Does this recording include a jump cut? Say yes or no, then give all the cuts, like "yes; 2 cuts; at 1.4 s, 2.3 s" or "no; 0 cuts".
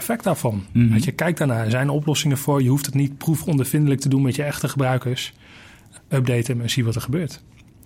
yes; 1 cut; at 6.0 s